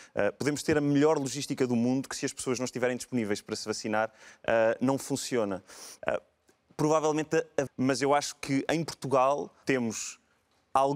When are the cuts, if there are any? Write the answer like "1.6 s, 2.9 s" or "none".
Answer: 6.0 s, 7.7 s, 9.6 s